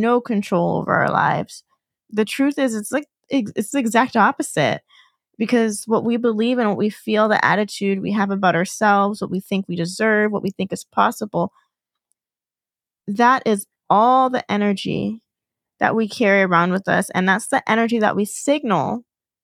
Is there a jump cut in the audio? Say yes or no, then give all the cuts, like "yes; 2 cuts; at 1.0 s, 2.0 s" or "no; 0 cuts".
no; 0 cuts